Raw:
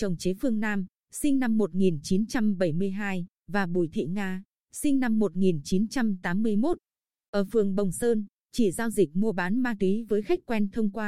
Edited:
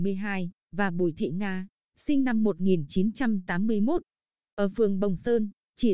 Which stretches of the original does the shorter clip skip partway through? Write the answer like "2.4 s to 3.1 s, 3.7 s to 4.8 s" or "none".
none